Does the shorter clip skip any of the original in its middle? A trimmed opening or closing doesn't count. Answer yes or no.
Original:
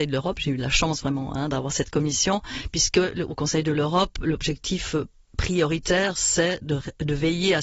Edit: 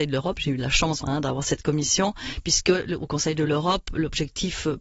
yes